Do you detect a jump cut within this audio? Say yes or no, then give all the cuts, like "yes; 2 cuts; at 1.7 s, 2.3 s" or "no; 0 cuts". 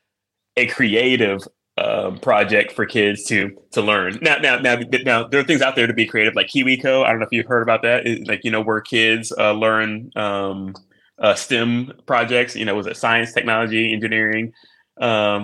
no; 0 cuts